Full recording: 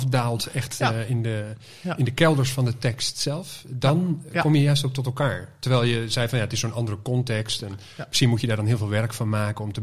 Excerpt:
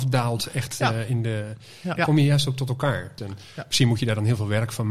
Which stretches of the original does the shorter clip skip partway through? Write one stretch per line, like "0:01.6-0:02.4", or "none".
0:02.0-0:04.3
0:05.5-0:07.6